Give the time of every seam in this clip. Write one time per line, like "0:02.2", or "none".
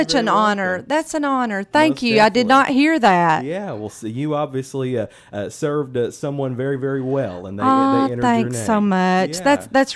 none